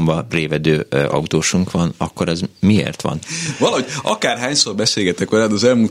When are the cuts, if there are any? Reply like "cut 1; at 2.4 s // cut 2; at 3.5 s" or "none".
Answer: cut 1; at 3.2 s